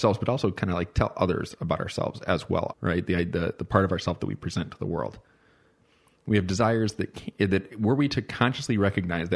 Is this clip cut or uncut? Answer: cut